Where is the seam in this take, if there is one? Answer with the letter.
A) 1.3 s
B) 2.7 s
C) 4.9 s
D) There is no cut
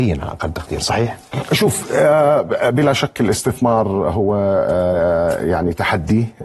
A